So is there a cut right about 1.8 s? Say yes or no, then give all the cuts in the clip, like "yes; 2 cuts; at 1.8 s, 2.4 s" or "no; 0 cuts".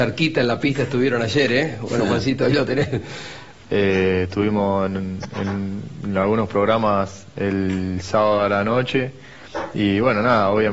no; 1 cut; at 3.6 s